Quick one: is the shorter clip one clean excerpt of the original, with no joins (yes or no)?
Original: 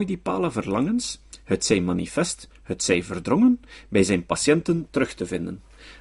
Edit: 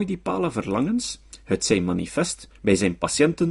no